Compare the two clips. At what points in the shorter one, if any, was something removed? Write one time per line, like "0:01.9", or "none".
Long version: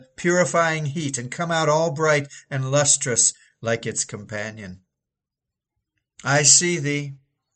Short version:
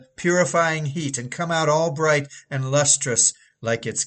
none